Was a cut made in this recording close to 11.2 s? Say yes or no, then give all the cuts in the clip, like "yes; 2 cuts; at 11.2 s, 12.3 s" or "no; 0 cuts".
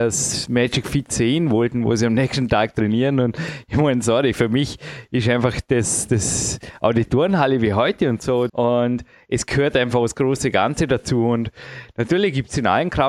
no; 1 cut; at 8.5 s